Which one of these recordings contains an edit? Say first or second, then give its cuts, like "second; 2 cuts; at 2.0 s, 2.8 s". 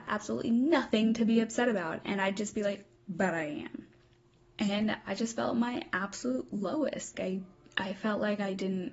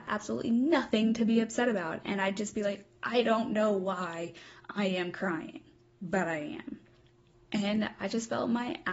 first; 2 cuts; at 3.0 s, 7.1 s